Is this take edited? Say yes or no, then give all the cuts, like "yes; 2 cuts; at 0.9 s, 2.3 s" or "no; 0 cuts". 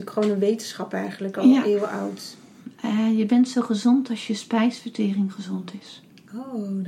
no; 0 cuts